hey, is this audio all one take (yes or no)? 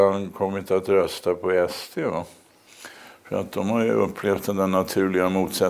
yes